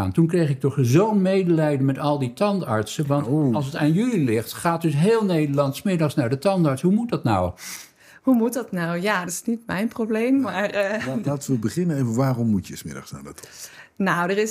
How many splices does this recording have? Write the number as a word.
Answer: one